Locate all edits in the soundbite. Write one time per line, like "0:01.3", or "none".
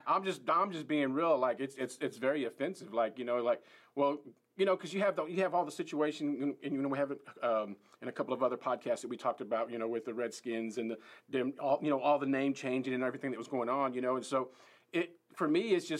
none